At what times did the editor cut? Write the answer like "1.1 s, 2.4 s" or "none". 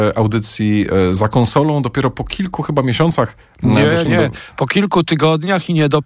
4.1 s